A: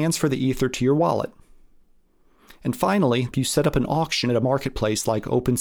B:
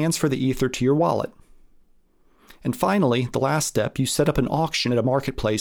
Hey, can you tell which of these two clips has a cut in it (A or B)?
A